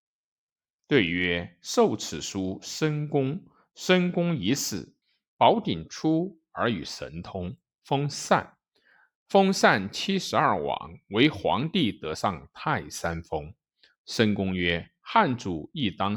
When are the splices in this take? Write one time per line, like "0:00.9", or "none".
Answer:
0:05.0